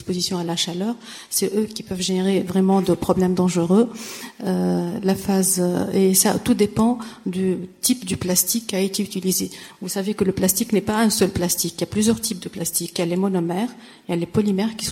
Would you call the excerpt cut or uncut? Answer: uncut